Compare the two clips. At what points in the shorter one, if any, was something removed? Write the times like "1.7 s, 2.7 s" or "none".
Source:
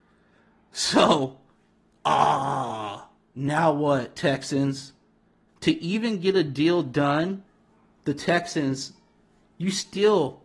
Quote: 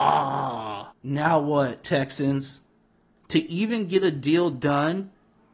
0.9 s